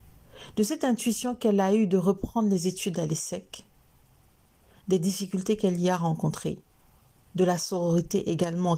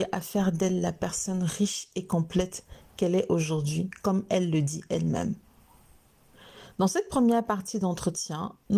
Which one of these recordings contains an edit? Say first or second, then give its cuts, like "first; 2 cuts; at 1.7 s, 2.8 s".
second; 1 cut; at 6.7 s